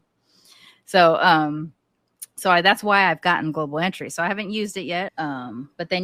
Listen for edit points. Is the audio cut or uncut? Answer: cut